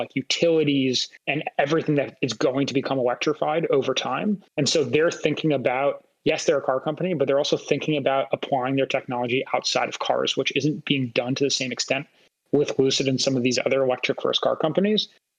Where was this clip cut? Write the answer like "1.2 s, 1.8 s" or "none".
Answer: 1.2 s, 4.5 s